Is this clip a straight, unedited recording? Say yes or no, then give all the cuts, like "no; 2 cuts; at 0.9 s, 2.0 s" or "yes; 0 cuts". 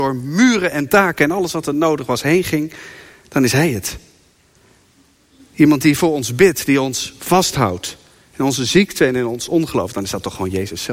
yes; 0 cuts